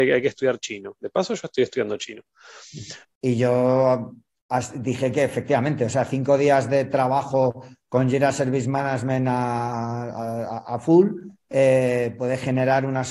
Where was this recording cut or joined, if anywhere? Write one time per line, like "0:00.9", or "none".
0:03.0